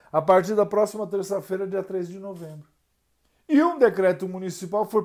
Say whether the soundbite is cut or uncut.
uncut